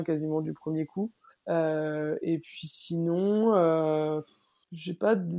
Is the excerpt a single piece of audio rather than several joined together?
no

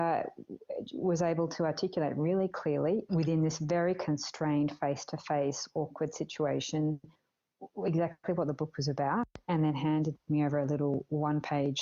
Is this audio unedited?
no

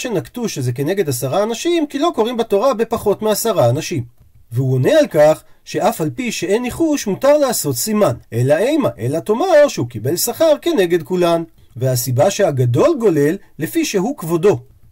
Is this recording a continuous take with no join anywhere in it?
no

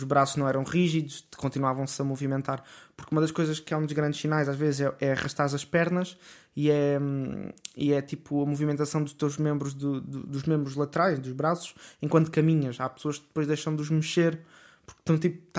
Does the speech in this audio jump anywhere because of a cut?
no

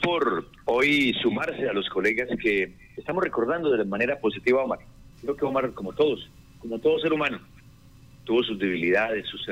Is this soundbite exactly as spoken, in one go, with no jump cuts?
no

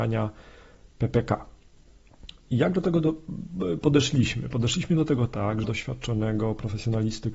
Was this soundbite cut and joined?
yes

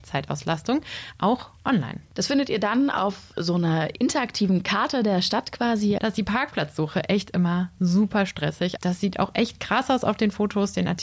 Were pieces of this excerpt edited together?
yes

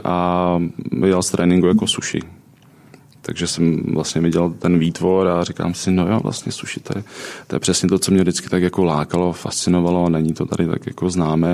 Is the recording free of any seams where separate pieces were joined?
yes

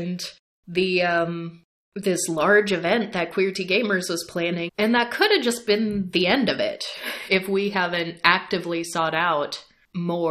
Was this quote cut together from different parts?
yes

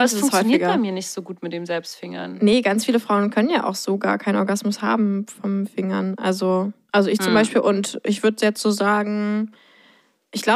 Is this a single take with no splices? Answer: yes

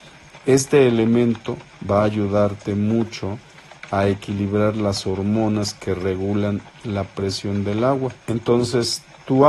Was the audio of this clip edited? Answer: yes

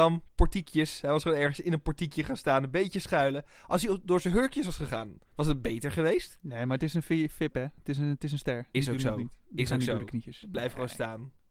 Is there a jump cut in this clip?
yes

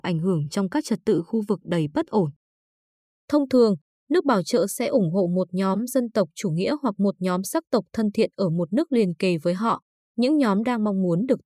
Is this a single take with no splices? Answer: yes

